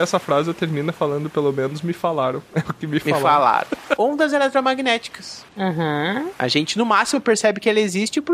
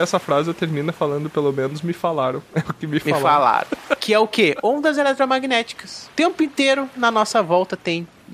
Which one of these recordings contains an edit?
first; 2 cuts; at 4.0 s, 5.5 s

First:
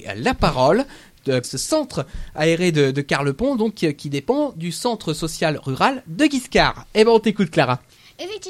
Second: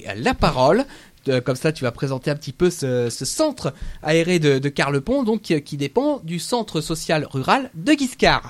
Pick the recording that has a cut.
first; 1 cut; at 1.4 s

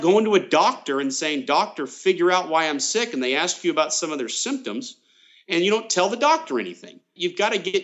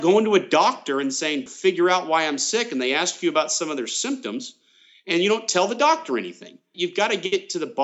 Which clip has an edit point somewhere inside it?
second; 1 cut; at 1.5 s

